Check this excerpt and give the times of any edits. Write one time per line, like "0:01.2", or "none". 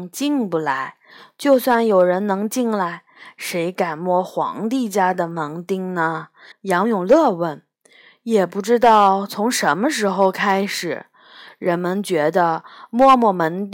0:06.5